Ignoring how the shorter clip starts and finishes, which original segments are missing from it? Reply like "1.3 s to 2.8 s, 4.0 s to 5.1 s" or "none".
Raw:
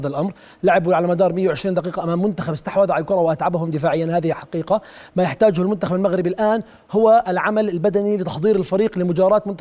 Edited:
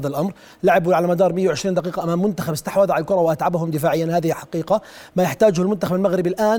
none